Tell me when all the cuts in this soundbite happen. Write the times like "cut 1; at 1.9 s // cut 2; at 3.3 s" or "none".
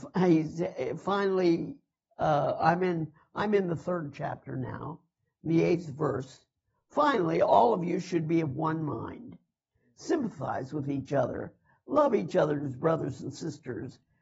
none